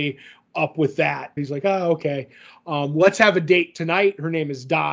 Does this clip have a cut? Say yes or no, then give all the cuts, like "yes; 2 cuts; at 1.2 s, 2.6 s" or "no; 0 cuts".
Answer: yes; 1 cut; at 1.4 s